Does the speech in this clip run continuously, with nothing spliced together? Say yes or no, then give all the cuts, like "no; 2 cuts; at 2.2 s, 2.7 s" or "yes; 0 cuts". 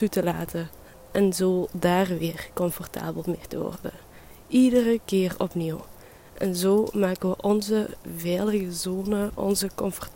yes; 0 cuts